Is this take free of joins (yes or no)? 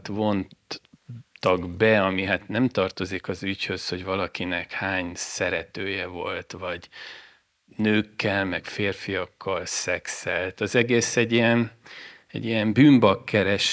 no